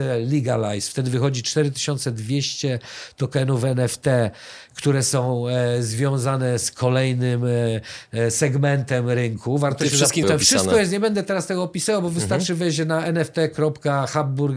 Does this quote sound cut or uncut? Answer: cut